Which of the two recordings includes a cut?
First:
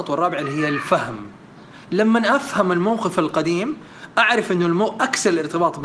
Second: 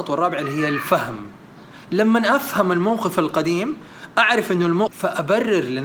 second; 1 cut; at 4.9 s

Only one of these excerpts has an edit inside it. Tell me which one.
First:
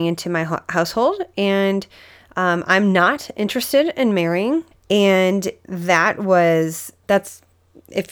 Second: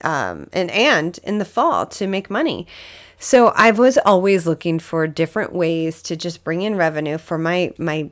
first; 2 cuts; at 4.7 s, 7.0 s

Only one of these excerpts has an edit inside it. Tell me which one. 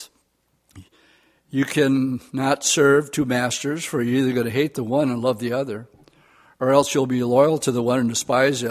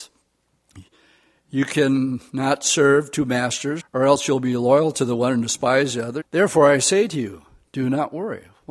second; 2 cuts; at 3.8 s, 6.2 s

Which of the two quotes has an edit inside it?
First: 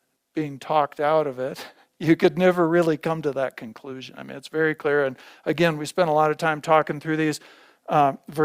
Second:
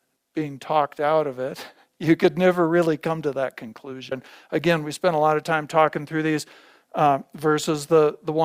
second; 1 cut; at 4.1 s

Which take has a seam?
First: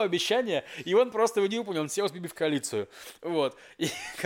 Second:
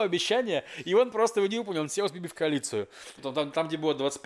second; 1 cut; at 3.2 s

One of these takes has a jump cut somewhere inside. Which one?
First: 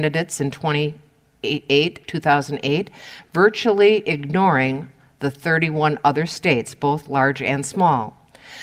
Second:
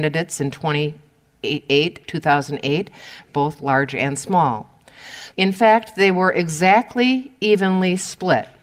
second; 2 cuts; at 3.3 s, 5.3 s

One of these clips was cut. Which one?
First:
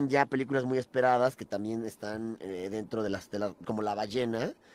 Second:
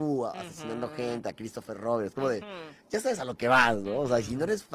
first; 1 cut; at 3.6 s

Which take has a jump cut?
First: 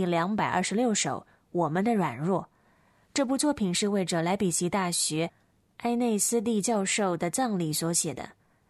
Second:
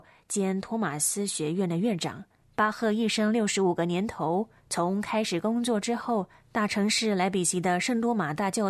second; 3 cuts; at 2.4 s, 4.6 s, 6.4 s

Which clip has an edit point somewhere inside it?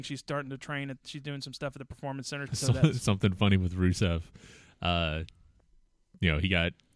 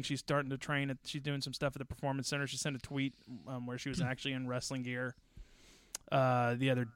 first; 1 cut; at 2.5 s

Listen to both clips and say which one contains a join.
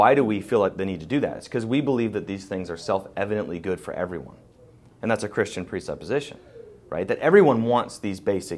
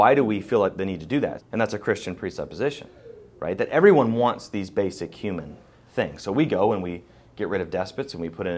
second; 1 cut; at 1.4 s

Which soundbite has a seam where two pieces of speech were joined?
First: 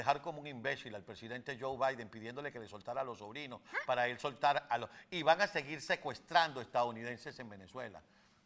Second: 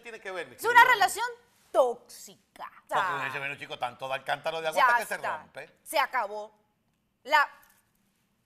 second; 1 cut; at 2.9 s

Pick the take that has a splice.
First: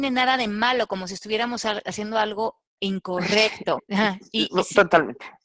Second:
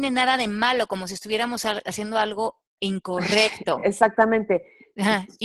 first; 1 cut; at 3.8 s

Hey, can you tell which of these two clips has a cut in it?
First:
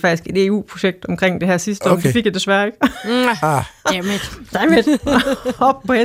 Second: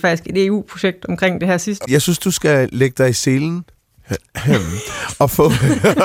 second; 1 cut; at 1.8 s

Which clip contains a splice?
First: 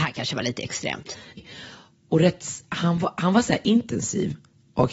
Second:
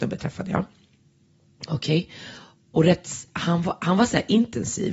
first; 1 cut; at 1.4 s

